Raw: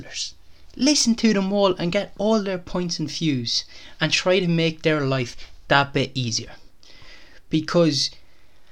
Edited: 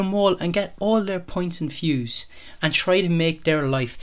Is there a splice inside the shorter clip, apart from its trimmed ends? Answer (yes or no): no